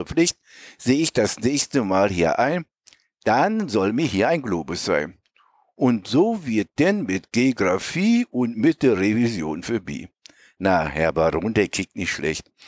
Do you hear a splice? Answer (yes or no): no